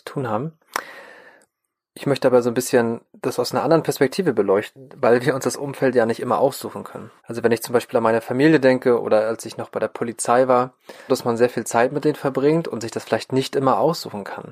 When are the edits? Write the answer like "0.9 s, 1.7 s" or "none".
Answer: 7.2 s, 11.1 s